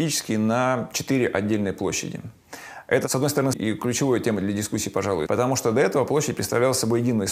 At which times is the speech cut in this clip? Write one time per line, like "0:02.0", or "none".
0:03.5
0:05.3